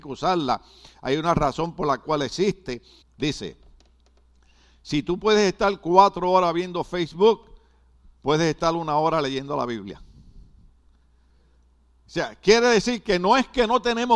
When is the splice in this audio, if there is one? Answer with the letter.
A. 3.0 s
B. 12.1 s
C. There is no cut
A